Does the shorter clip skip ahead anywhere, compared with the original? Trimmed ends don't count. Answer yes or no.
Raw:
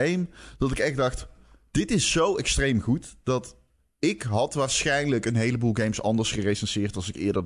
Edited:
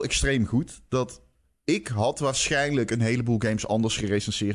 no